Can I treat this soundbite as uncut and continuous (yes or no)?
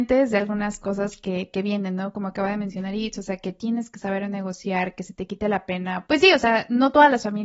no